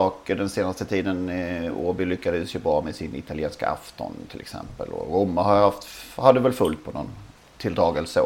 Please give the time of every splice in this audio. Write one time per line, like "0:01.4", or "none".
none